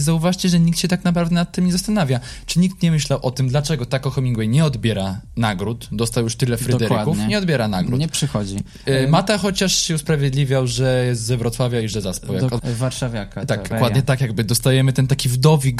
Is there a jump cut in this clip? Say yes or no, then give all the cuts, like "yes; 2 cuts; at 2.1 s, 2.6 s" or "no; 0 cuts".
yes; 2 cuts; at 12.6 s, 13.7 s